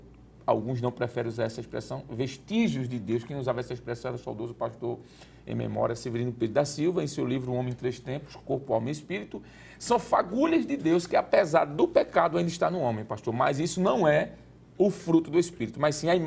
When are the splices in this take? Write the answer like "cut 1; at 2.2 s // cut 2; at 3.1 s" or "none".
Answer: none